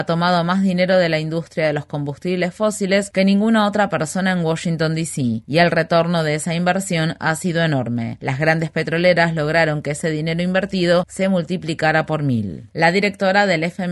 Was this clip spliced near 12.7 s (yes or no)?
yes